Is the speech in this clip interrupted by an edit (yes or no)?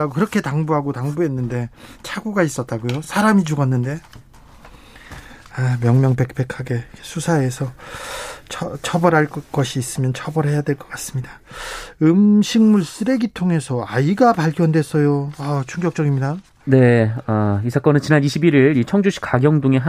no